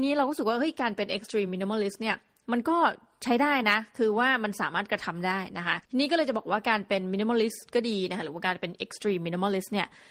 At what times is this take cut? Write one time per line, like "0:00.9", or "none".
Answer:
0:05.8